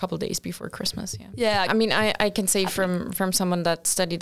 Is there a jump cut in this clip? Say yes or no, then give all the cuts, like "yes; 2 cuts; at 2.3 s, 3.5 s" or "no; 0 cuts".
yes; 1 cut; at 1.7 s